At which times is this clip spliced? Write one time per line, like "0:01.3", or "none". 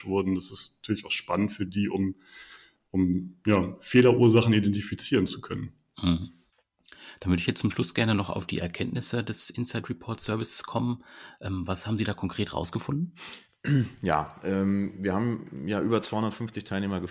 none